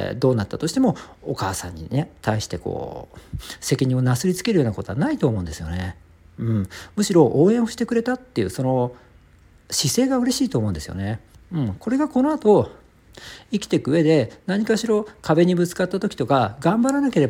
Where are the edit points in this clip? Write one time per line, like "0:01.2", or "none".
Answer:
none